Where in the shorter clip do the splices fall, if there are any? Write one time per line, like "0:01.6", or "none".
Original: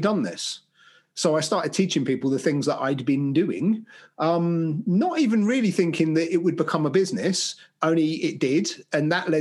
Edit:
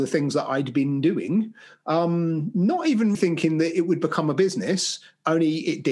0:03.2